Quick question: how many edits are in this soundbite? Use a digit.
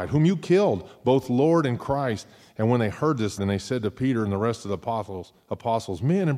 1